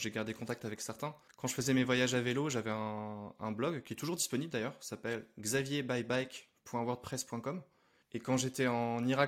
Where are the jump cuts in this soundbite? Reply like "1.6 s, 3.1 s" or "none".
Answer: 1.3 s, 8.0 s